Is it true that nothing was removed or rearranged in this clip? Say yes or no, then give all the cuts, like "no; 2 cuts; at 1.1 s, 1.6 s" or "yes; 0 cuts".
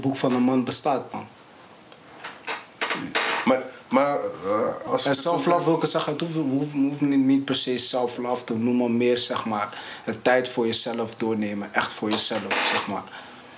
no; 1 cut; at 4.9 s